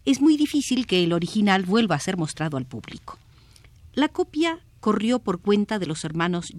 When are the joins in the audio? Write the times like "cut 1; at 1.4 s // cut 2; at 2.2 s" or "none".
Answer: none